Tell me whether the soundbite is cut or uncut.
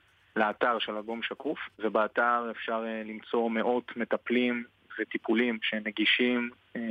cut